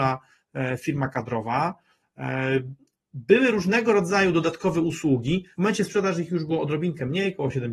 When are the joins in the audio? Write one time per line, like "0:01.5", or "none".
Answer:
0:05.5